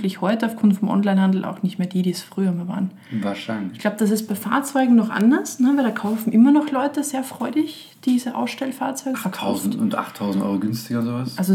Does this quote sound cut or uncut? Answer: cut